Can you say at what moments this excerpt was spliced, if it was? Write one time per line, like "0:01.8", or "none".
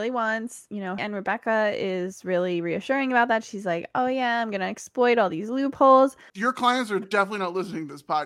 0:01.0
0:06.3